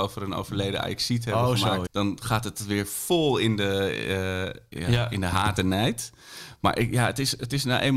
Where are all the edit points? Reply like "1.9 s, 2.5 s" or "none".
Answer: 1.9 s